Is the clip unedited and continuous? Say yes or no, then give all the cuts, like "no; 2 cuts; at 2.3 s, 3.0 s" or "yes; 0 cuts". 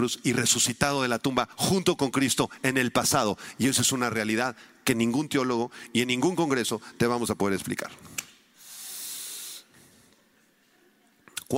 yes; 0 cuts